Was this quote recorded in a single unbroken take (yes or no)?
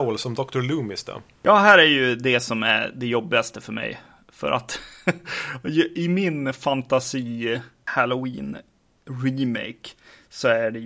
yes